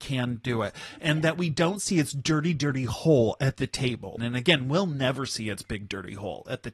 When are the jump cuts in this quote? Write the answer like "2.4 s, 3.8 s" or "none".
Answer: 4.2 s